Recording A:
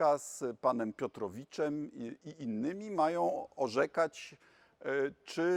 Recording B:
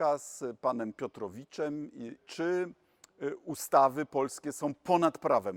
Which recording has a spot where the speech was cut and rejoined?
B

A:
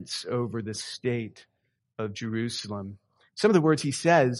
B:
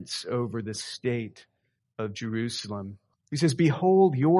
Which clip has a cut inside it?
B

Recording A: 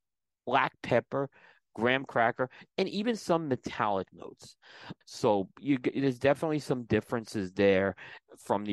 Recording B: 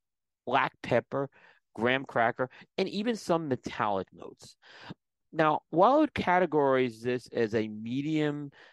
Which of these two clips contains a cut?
A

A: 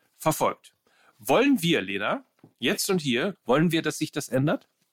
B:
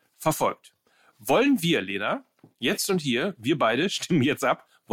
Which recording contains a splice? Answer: A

